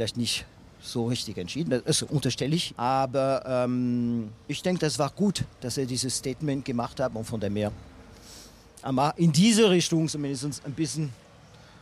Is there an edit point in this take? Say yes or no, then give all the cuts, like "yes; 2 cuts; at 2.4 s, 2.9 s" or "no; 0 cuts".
yes; 2 cuts; at 2.7 s, 4.4 s